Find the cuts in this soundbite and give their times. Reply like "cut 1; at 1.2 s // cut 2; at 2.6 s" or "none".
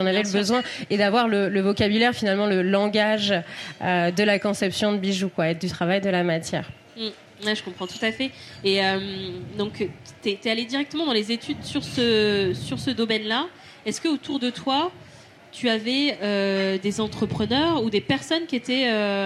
none